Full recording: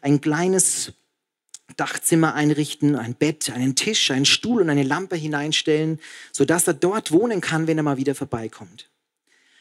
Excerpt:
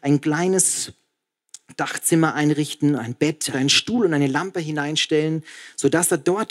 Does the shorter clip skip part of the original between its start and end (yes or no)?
yes